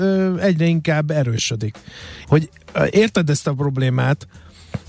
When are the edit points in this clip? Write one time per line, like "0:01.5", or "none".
0:02.2